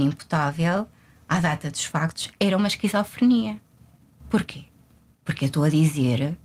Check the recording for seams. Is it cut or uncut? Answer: uncut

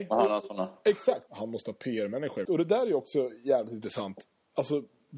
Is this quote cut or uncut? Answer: cut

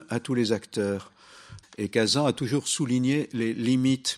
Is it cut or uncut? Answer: cut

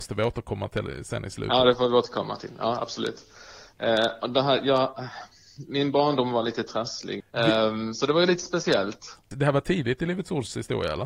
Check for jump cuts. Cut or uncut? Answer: cut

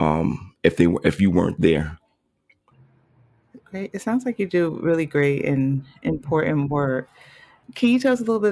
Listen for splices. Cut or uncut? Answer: uncut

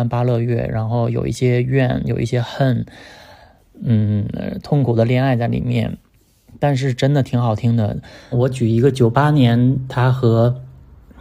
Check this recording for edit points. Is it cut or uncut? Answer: cut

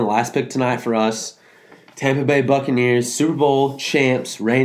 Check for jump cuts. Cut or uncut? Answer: uncut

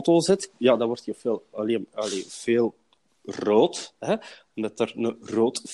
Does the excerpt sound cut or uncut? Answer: uncut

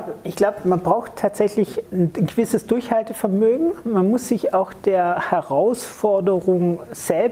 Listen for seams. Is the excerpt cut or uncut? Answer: cut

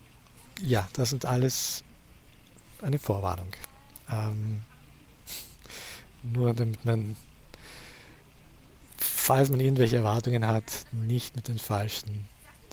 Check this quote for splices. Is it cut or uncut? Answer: uncut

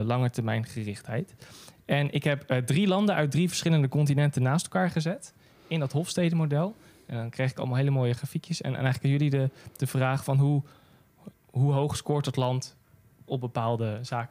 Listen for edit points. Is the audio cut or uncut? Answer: cut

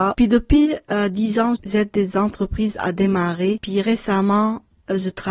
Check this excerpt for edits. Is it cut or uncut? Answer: cut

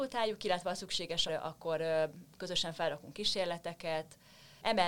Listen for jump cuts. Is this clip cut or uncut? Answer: cut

